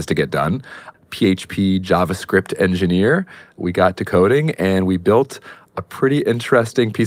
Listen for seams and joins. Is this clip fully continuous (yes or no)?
no